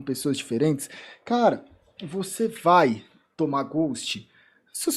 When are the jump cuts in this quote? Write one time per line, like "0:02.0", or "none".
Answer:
none